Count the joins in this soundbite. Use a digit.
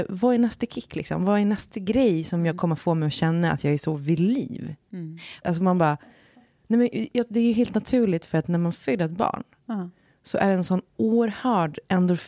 1